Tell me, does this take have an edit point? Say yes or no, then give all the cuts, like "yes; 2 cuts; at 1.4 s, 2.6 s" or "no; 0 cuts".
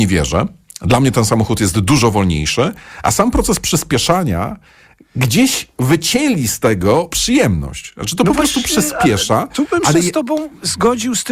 no; 0 cuts